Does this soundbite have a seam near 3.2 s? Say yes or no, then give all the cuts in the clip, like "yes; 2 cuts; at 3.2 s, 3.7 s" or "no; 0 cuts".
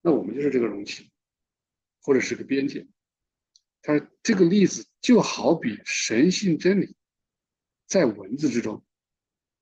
no; 0 cuts